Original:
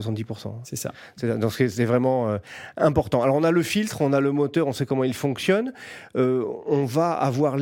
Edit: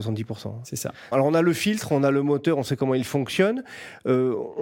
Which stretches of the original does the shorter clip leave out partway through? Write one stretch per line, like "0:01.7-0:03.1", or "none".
0:01.1-0:03.2